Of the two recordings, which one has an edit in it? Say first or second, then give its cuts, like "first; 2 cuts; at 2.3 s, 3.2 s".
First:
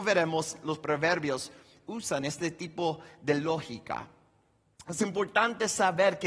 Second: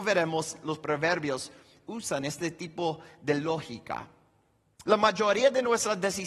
second; 1 cut; at 4.8 s